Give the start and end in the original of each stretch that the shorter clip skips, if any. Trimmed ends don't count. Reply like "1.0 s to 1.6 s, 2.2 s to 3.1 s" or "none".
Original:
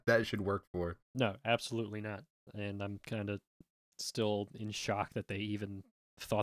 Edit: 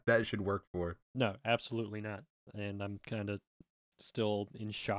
none